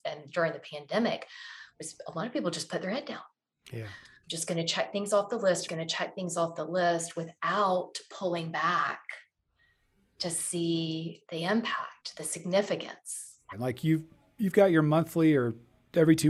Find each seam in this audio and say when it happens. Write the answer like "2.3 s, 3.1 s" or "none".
5.7 s, 13.5 s

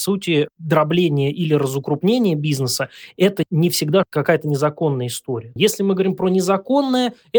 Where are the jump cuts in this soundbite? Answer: 5.6 s

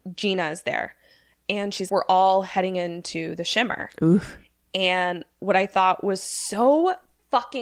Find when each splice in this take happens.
1.9 s

